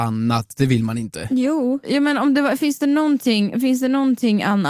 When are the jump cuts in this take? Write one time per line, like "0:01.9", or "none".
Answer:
0:01.8